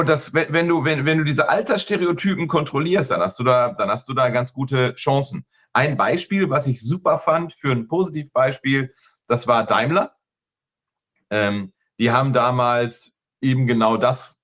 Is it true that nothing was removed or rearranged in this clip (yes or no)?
yes